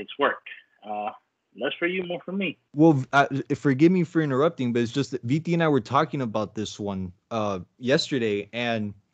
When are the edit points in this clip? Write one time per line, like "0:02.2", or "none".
0:02.7
0:07.7